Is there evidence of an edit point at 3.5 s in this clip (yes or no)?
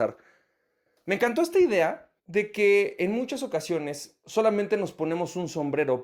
no